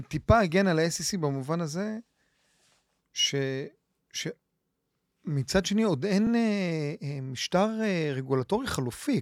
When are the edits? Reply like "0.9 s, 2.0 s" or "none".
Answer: none